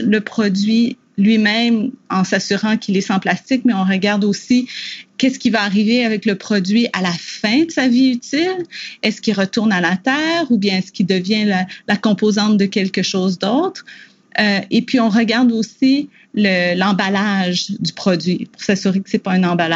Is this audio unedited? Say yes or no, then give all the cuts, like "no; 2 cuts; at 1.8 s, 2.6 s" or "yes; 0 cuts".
yes; 0 cuts